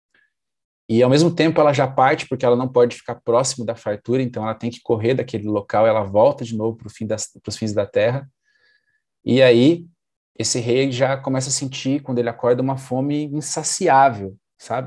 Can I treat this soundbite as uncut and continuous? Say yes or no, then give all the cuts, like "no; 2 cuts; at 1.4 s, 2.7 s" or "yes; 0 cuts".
yes; 0 cuts